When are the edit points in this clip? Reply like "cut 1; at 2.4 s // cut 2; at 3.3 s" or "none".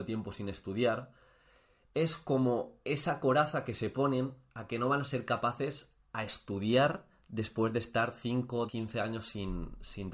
cut 1; at 8.7 s